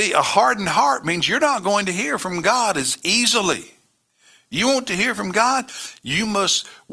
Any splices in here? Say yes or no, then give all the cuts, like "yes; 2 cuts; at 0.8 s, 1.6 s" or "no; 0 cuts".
no; 0 cuts